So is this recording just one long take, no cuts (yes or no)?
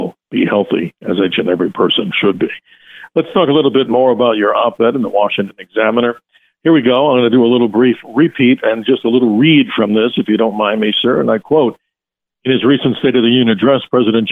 yes